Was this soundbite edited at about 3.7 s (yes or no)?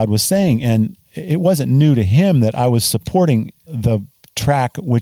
yes